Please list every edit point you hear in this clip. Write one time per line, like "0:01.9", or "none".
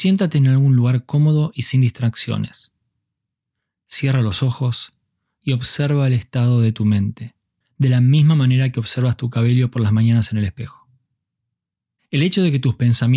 0:12.0